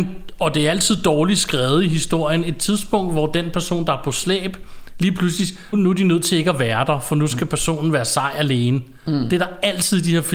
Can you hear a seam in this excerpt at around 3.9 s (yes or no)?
no